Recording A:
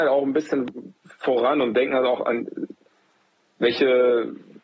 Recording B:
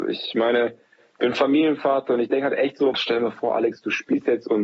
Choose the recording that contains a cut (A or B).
B